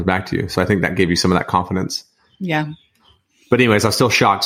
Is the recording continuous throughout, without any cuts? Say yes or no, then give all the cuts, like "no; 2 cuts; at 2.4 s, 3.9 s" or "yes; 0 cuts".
yes; 0 cuts